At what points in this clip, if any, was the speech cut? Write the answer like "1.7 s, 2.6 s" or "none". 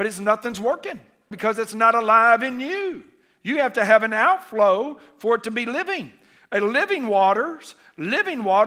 1.3 s

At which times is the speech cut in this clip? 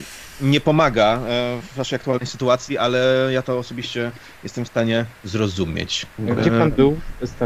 6.1 s

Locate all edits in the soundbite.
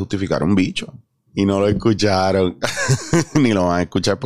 1.3 s

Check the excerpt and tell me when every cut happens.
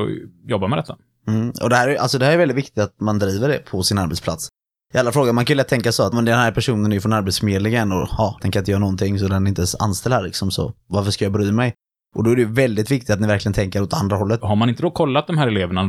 6.1 s, 8.4 s, 14.4 s

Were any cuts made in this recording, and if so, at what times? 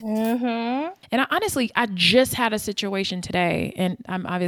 1.0 s

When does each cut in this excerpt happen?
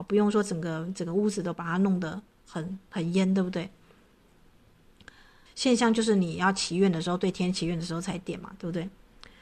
5.5 s

